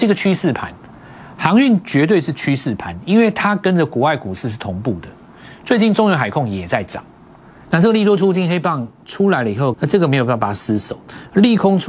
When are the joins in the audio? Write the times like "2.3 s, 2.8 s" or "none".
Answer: 7.7 s, 9.7 s